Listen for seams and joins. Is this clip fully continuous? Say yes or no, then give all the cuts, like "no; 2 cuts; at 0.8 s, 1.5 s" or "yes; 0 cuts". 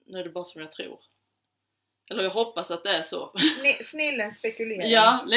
yes; 0 cuts